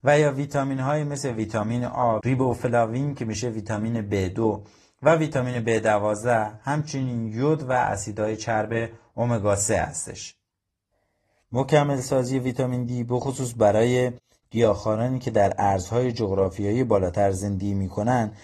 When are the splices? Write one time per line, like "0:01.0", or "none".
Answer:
0:02.2
0:11.4